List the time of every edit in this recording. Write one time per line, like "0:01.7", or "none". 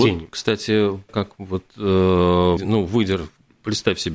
0:01.1
0:02.6